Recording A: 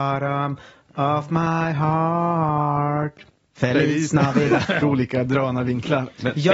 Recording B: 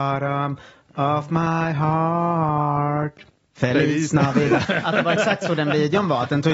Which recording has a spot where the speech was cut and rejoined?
A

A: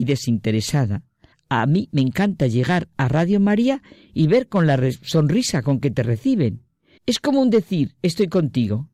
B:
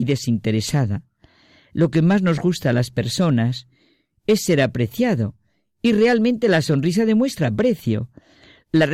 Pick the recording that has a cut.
A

